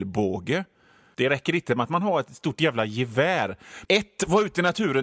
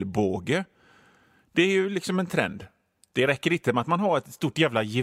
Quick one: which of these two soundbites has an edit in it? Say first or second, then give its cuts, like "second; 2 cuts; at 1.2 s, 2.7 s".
first; 2 cuts; at 1.1 s, 3.8 s